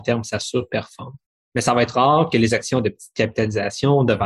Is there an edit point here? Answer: no; 0 cuts

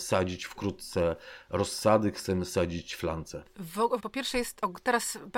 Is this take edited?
yes; 1 cut; at 4.0 s

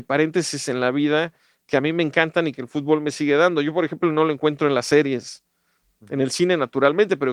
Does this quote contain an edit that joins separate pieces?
no; 0 cuts

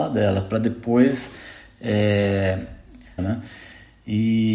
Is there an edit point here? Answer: yes; 1 cut; at 3.2 s

